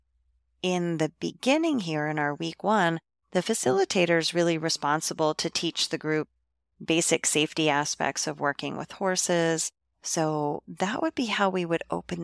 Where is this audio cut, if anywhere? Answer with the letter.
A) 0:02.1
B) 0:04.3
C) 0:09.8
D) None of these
C